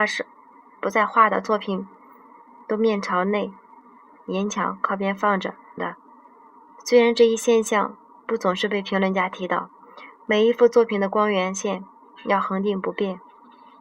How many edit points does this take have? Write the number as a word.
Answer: one